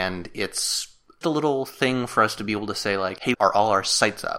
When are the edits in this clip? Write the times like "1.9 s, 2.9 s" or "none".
1.2 s, 3.3 s